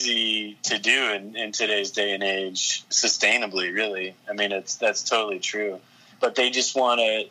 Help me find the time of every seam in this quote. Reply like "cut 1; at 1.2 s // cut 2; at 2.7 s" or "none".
cut 1; at 6.1 s